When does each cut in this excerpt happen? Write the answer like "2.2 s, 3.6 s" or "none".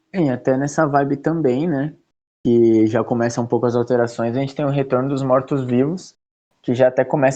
none

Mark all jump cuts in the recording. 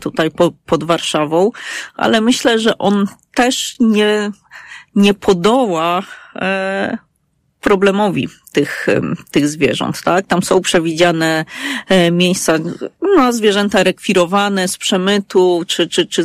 none

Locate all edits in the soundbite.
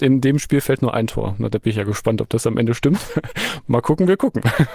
3.1 s

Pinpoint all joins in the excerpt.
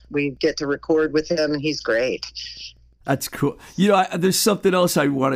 none

